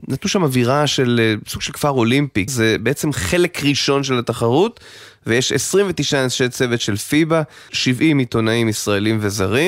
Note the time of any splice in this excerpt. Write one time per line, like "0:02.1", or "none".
0:02.5
0:07.7